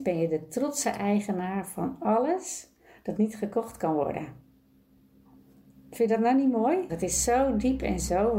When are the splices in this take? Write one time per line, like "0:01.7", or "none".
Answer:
0:06.9